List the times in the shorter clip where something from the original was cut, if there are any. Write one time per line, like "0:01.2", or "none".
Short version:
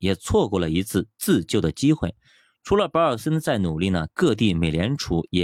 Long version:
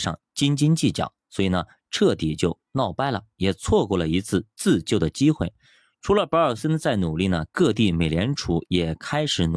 none